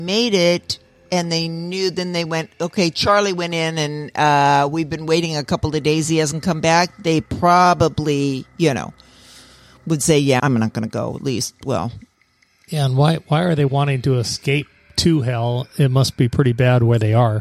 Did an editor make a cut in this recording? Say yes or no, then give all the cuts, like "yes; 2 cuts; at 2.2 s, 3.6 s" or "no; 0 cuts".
yes; 1 cut; at 10.4 s